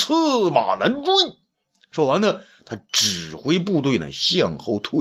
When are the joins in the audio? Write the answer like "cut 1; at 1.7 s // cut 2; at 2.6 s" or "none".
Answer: none